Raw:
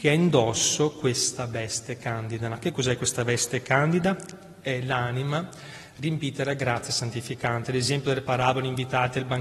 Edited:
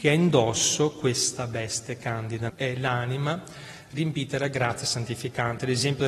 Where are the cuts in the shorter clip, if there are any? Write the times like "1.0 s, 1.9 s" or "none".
2.5 s